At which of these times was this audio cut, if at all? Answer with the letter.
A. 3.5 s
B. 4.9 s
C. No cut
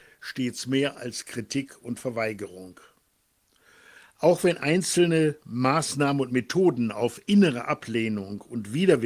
C